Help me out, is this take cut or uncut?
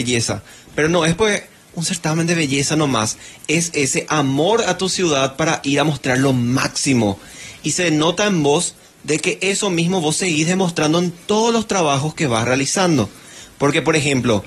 uncut